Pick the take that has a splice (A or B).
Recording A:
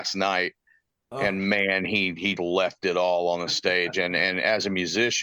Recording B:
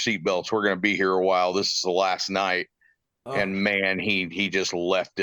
A